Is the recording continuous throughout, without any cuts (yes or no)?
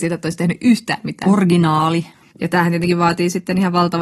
yes